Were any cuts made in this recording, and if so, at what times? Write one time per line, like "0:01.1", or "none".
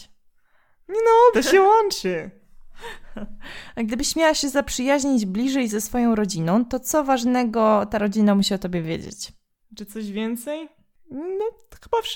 0:01.3
0:09.6